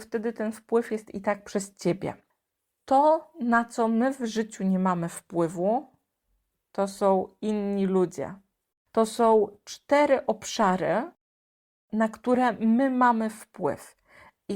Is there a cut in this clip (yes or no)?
yes